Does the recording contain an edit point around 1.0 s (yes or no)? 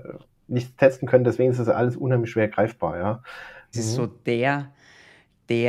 no